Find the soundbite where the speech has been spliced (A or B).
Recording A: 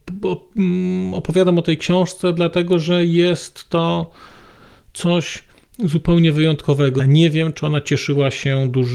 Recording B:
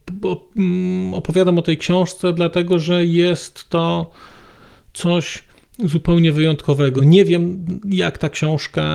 A